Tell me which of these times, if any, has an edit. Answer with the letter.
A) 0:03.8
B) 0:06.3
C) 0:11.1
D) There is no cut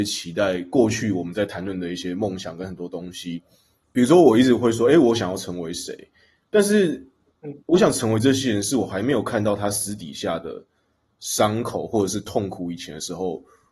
A